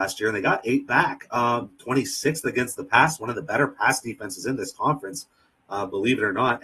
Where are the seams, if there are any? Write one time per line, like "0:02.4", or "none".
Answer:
0:01.8

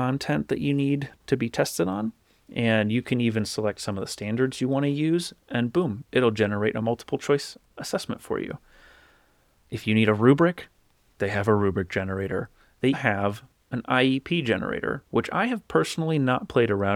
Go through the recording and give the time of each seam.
0:12.9

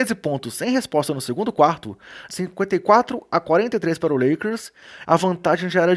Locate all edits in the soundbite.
0:02.3
0:05.0

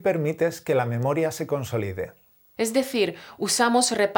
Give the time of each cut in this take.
0:02.6

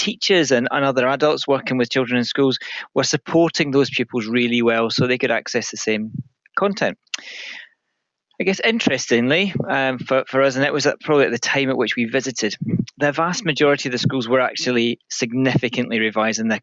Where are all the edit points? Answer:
none

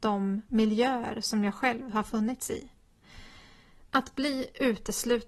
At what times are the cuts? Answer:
0:03.9

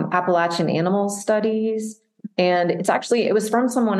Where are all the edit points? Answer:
none

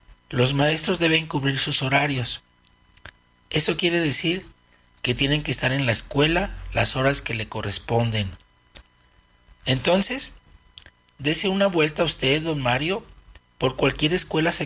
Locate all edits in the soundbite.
none

